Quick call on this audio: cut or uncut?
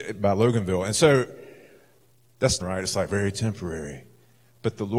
cut